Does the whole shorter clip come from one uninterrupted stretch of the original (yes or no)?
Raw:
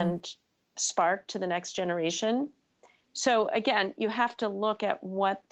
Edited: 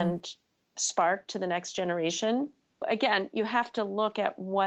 no